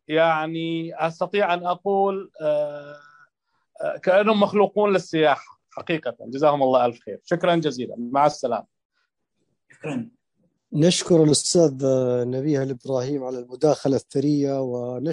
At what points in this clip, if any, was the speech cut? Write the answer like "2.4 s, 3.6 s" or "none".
none

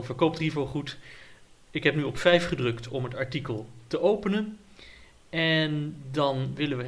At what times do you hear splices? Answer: none

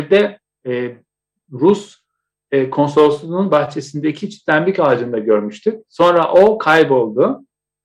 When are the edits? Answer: none

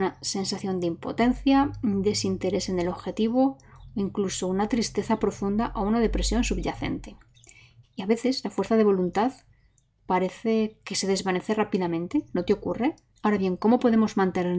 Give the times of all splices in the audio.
7.8 s

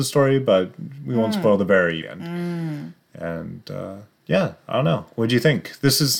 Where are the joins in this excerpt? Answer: 2.0 s

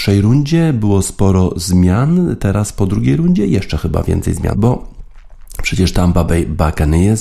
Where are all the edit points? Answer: 4.5 s

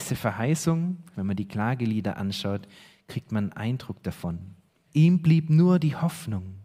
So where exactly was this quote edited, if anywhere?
1.1 s, 4.9 s

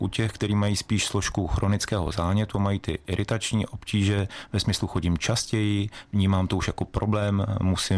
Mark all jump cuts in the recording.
none

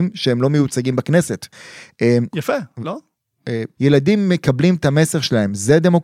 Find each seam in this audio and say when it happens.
2.3 s, 3.8 s

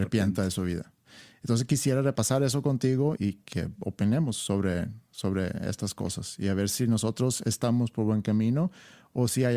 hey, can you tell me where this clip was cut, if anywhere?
3.2 s

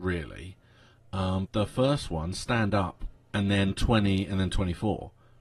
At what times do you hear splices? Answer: 1.5 s, 3.2 s

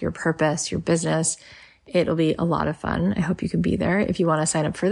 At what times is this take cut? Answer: none

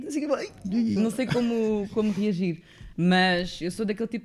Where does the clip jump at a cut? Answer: 1.0 s, 2.9 s

